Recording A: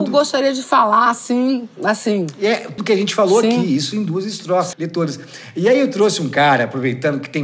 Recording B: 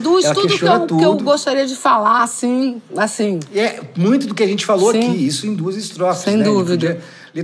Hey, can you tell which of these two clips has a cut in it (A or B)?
A